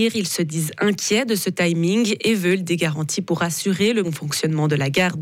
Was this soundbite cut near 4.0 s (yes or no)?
yes